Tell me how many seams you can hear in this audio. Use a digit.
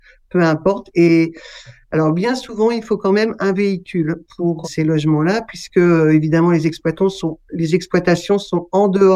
1